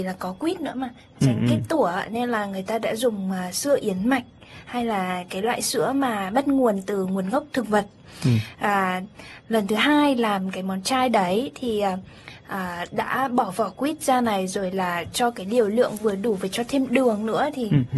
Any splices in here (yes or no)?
no